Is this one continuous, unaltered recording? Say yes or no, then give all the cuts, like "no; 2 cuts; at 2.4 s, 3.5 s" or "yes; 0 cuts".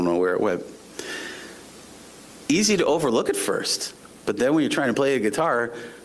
yes; 0 cuts